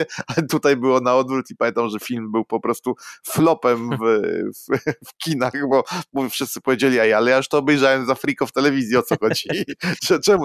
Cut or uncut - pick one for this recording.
uncut